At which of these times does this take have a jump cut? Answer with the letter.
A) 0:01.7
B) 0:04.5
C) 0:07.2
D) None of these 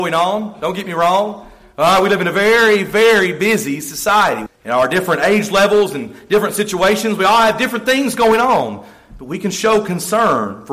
B